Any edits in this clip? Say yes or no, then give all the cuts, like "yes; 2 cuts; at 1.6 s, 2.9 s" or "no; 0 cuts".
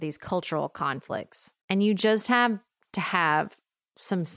yes; 1 cut; at 1.6 s